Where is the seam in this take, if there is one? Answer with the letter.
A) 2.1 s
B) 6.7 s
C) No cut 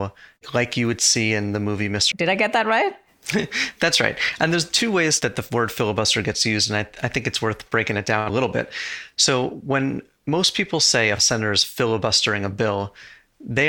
A